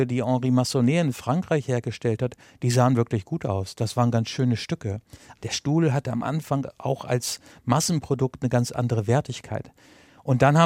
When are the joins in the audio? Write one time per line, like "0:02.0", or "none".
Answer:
none